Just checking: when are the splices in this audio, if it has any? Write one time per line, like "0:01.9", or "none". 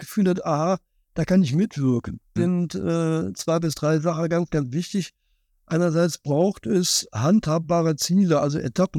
0:02.4